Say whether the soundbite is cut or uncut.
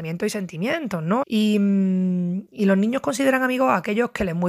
cut